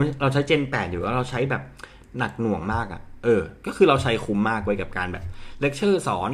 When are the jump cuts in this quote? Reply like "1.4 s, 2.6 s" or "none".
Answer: none

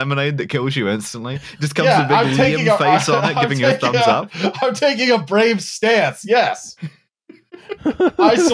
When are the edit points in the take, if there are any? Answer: none

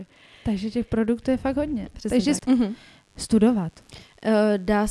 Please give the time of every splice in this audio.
2.4 s

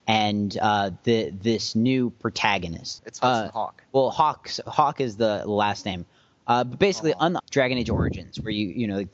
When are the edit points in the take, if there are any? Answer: 3.0 s, 7.4 s

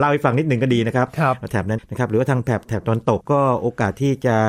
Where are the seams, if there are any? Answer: 1.8 s, 3.2 s

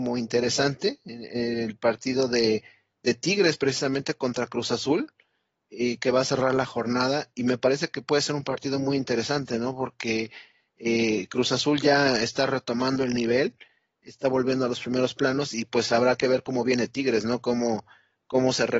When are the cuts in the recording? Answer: none

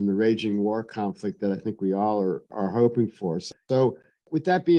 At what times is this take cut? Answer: none

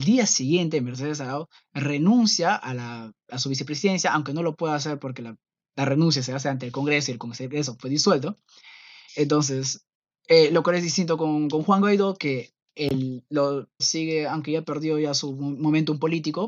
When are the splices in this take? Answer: 9.1 s, 13.8 s

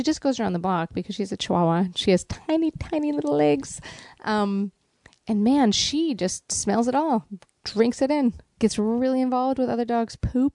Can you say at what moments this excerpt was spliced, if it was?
2.7 s, 8.5 s

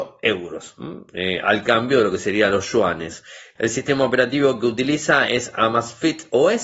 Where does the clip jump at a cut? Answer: 3.6 s

